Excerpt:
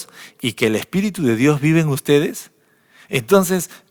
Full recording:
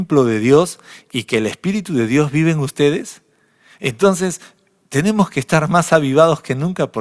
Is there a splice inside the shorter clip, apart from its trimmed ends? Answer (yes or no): no